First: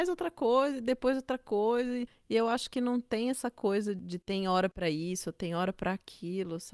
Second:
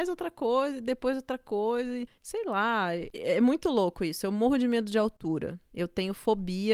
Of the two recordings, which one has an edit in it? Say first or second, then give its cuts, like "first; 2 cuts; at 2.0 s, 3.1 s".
second; 1 cut; at 2.2 s